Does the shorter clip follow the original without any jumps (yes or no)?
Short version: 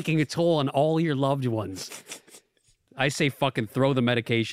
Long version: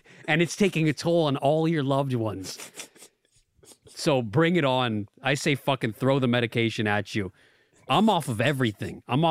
no